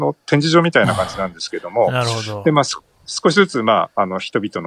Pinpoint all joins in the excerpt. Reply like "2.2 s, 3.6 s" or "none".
none